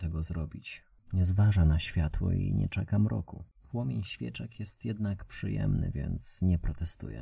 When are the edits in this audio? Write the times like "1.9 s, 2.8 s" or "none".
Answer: 1.0 s, 3.5 s